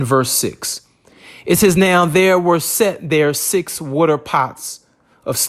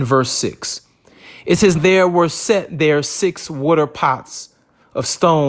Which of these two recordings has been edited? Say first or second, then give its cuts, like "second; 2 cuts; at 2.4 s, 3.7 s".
second; 1 cut; at 1.7 s